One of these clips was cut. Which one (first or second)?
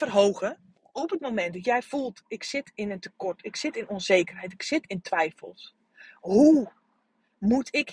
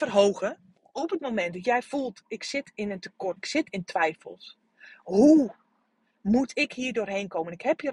second